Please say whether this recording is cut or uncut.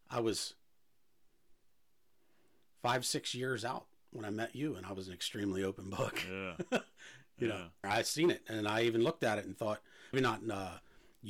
cut